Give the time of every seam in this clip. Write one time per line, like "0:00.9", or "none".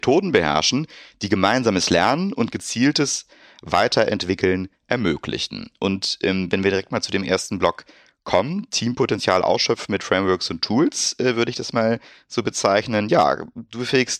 none